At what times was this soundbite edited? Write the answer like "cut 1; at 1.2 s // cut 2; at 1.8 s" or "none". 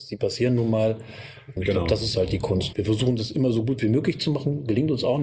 cut 1; at 1.6 s // cut 2; at 2.7 s